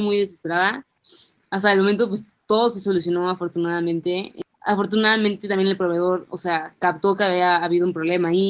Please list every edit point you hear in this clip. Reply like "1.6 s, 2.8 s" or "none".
none